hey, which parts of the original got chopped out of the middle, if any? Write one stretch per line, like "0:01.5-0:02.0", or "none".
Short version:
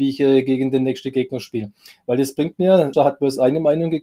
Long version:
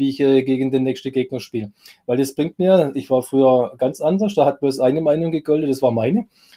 0:02.9-0:04.3